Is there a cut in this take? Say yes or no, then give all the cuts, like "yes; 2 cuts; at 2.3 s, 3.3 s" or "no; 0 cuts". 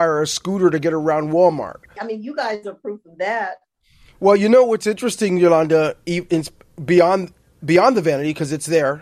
yes; 1 cut; at 2.0 s